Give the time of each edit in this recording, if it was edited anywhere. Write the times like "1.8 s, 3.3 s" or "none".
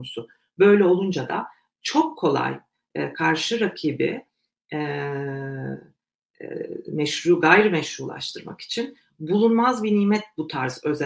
none